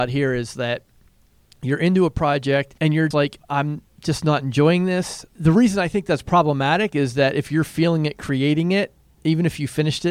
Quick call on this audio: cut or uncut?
cut